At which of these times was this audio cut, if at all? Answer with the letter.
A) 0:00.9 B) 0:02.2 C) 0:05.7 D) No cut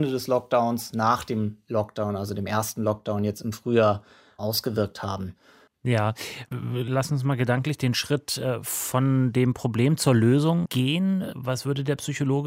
C